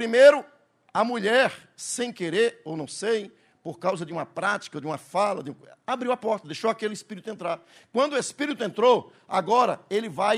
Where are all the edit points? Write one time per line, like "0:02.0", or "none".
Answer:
none